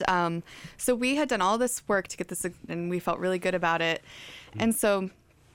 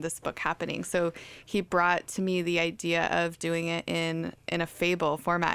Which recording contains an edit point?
first; 2 cuts; at 2.7 s, 4.5 s

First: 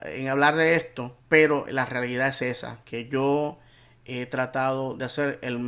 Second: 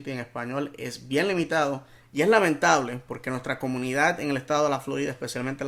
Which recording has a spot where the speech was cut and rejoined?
first; 1 cut; at 1.2 s

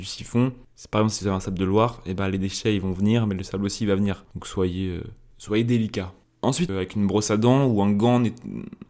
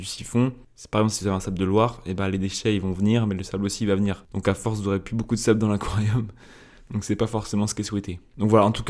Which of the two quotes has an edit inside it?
first; 2 cuts; at 4.3 s, 6.7 s

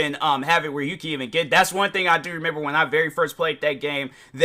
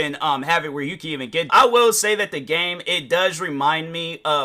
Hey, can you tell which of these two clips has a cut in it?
second; 1 cut; at 1.5 s

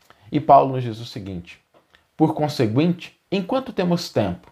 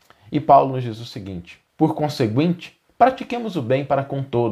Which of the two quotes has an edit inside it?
second; 2 cuts; at 1.7 s, 2.8 s

